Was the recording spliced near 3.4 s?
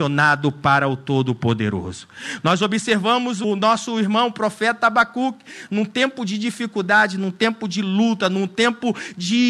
yes; 1 cut; at 3.4 s

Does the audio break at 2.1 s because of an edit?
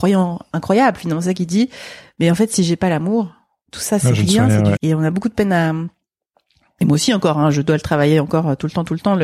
no; 1 cut; at 4.8 s

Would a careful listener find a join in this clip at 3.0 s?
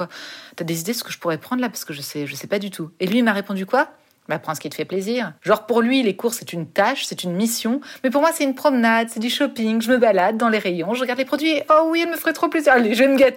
no; 2 cuts; at 5.4 s, 11.7 s

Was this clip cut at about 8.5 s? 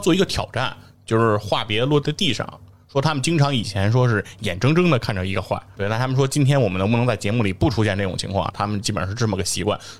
yes; 3 cuts; at 0.9 s, 5.8 s, 8.5 s

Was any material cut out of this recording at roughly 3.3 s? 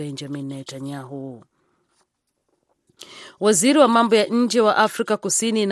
no; 0 cuts

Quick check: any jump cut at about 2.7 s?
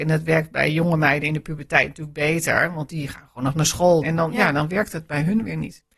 no; 1 cut; at 4.0 s

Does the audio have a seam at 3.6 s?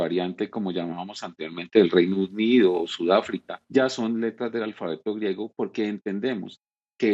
yes; 1 cut; at 3.6 s

